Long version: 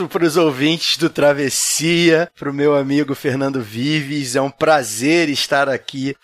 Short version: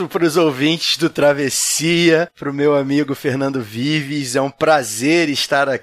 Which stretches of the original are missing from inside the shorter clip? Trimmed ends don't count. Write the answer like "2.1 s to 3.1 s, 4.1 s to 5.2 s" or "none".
none